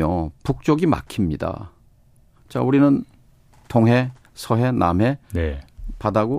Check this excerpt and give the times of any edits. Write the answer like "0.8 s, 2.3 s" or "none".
none